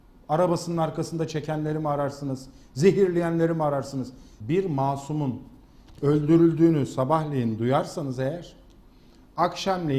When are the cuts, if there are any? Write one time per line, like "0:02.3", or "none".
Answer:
0:04.4